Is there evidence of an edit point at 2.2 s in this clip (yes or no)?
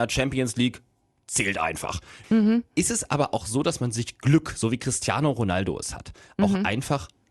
yes